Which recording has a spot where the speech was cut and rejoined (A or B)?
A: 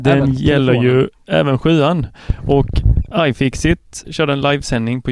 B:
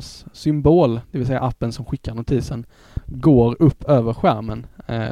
A